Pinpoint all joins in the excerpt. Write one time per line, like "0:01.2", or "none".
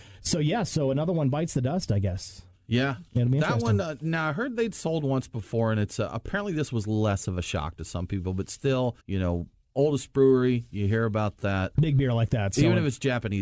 0:09.0
0:11.8